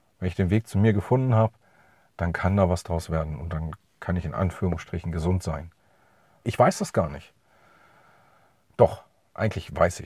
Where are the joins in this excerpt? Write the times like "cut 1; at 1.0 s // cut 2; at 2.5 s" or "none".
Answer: cut 1; at 6.4 s